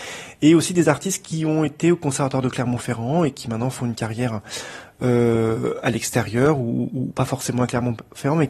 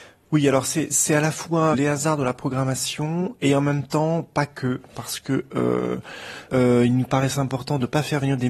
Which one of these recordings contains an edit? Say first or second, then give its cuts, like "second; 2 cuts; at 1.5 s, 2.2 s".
second; 2 cuts; at 1.7 s, 6.5 s